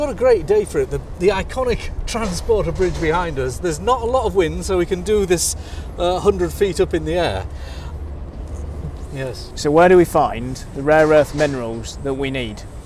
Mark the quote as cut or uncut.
cut